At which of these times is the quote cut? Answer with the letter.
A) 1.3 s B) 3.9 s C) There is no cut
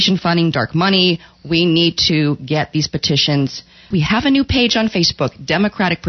B